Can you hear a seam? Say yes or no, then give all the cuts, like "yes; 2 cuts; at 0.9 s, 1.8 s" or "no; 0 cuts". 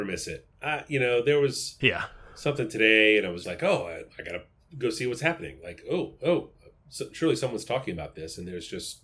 yes; 1 cut; at 3.4 s